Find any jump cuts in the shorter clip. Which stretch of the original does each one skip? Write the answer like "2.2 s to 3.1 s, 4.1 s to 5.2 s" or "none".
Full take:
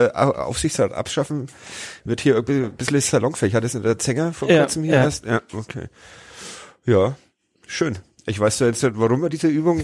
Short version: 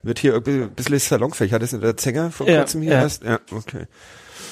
none